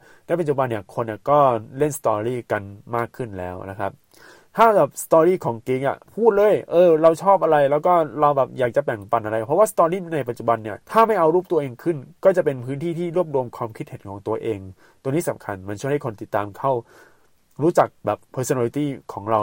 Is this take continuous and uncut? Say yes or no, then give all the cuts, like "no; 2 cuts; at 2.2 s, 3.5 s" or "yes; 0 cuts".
no; 2 cuts; at 6.0 s, 10.8 s